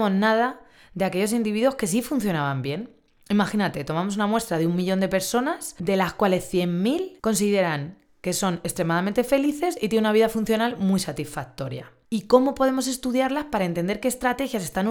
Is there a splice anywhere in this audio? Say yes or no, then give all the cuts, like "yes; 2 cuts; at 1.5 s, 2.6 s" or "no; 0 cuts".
yes; 1 cut; at 12.0 s